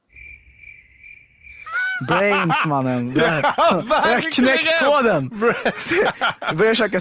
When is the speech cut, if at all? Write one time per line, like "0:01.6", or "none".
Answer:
none